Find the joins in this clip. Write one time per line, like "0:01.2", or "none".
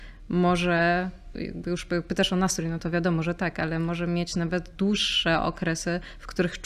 0:01.3